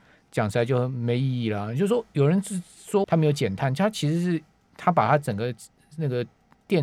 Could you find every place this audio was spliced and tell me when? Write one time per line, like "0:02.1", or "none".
0:03.0